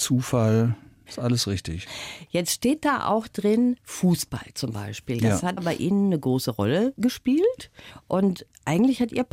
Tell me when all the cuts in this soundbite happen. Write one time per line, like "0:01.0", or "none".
none